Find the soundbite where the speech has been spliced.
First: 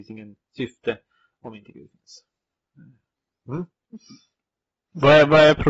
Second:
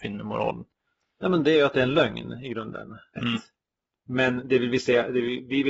second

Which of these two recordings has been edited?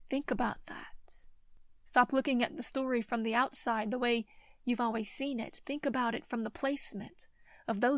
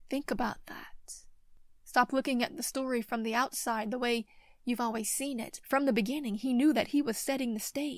second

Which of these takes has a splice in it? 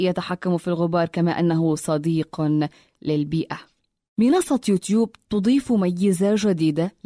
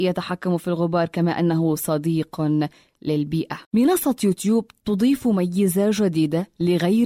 second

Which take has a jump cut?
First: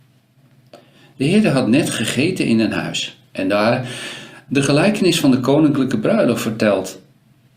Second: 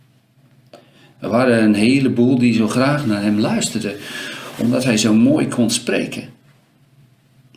second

